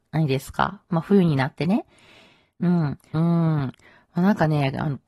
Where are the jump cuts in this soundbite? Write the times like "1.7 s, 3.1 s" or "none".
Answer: 3.1 s